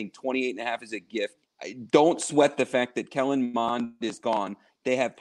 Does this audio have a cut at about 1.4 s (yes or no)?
yes